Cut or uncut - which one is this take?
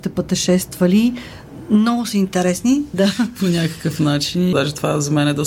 cut